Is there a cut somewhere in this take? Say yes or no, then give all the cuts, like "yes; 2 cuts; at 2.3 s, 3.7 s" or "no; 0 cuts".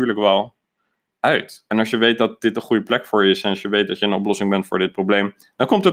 no; 0 cuts